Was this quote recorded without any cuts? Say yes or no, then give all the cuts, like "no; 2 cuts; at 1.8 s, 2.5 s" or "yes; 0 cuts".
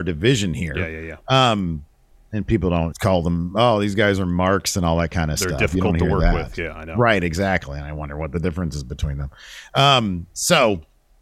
no; 1 cut; at 2.9 s